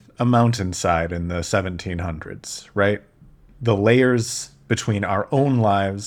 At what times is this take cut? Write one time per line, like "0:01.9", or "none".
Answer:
none